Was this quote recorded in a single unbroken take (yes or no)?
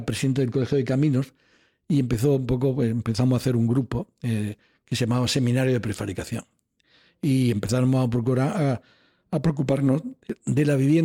yes